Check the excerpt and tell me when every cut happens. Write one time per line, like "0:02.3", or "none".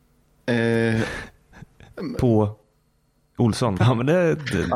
0:03.8